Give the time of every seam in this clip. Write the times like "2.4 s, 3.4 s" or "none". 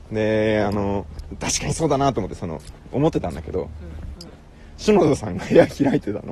2.8 s, 4.2 s